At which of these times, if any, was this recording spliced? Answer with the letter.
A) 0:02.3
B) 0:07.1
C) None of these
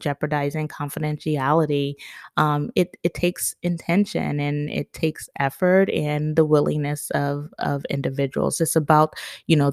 C